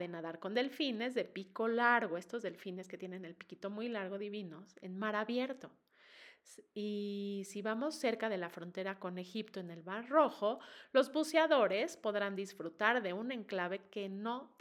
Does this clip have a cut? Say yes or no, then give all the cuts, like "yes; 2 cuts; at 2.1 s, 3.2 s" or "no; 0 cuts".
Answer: no; 0 cuts